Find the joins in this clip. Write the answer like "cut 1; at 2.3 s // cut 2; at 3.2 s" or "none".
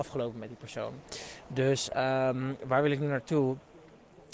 none

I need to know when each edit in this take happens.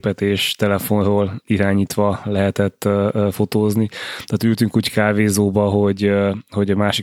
none

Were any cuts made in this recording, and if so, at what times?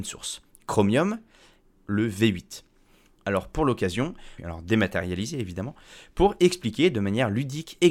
cut 1; at 1.8 s // cut 2; at 4.4 s

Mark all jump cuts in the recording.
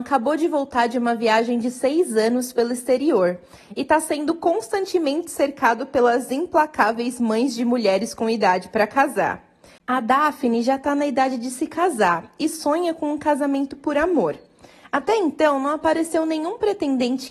cut 1; at 9.8 s

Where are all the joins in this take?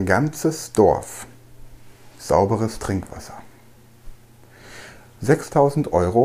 none

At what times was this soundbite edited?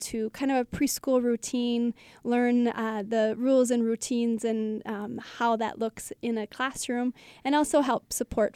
none

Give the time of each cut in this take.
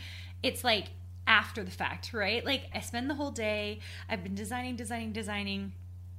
cut 1; at 2.7 s

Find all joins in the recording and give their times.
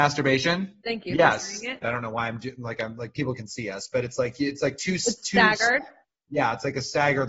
cut 1; at 1.8 s

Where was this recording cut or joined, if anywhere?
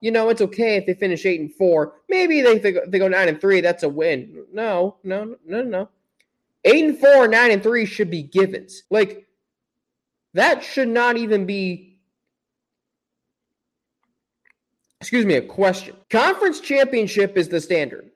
cut 1; at 8.8 s // cut 2; at 16.0 s

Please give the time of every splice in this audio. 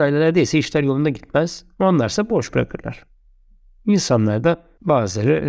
none

